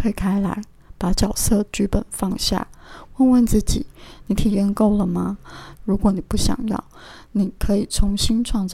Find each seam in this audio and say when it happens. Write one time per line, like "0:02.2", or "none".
0:05.7